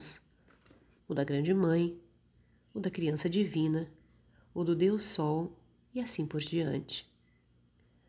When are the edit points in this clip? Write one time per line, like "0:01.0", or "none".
0:01.0